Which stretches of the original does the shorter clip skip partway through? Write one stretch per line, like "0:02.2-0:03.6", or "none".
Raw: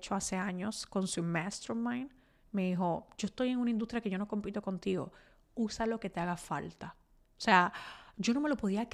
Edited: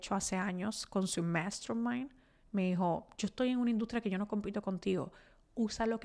none